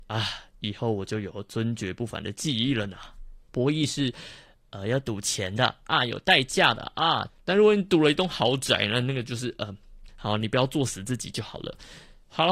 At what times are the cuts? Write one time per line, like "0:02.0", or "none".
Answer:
0:03.5
0:07.3
0:10.1